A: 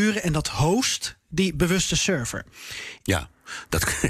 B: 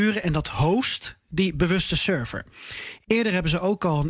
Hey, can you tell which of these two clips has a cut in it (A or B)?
A